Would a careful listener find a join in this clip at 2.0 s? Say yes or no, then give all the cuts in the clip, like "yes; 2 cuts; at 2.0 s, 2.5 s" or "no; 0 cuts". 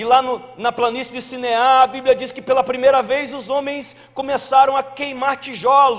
no; 0 cuts